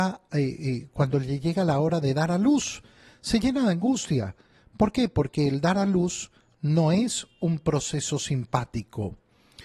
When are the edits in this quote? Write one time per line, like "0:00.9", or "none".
none